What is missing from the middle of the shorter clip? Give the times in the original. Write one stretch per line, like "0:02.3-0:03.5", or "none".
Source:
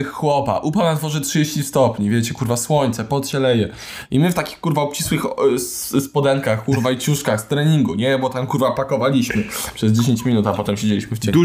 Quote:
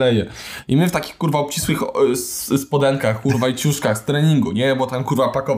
none